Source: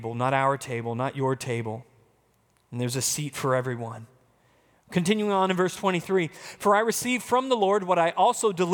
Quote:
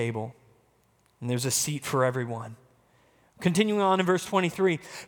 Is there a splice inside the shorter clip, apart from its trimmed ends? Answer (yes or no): no